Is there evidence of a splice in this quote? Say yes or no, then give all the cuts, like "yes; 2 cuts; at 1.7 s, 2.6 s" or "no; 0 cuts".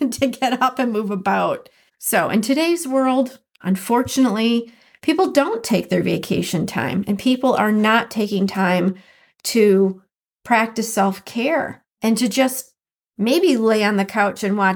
yes; 2 cuts; at 1.9 s, 11.9 s